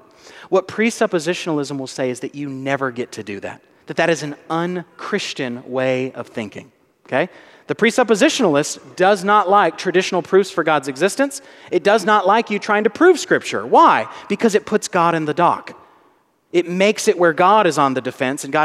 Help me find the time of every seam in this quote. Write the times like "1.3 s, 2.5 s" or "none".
none